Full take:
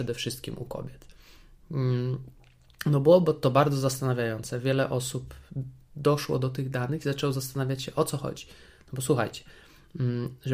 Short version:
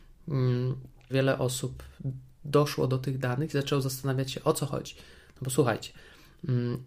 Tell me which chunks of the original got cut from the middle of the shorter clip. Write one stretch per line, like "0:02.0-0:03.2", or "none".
0:02.5-0:04.6